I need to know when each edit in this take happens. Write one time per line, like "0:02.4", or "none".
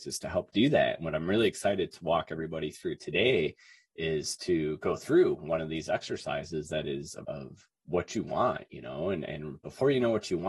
0:07.2

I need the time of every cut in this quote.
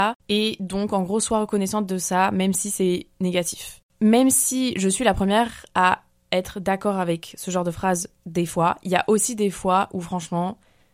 0:08.2

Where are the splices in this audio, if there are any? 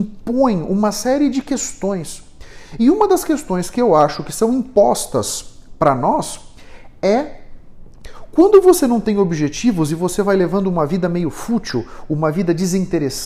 none

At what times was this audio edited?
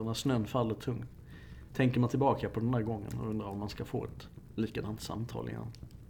none

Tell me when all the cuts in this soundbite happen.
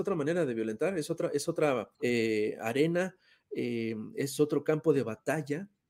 0:01.9

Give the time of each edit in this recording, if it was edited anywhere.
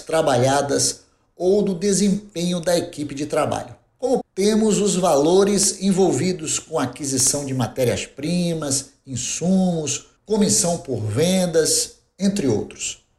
0:04.2
0:10.2

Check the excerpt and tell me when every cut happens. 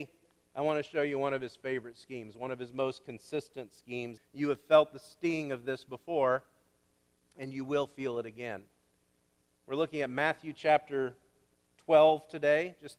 0:04.2

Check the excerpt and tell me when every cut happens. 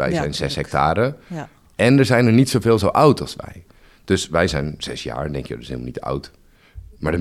none

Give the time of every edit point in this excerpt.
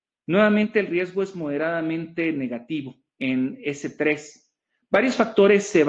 none

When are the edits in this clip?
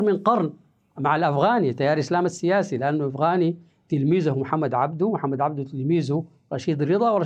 0:01.0

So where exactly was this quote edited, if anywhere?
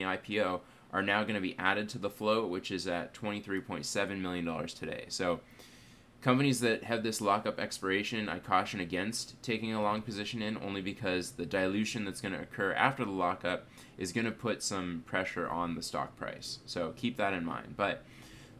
none

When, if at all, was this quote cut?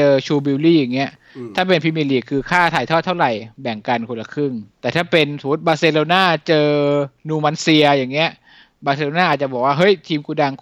0:04.7

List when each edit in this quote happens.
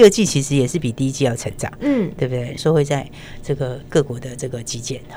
0:02.6

